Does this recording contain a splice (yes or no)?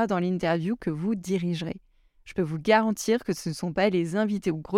no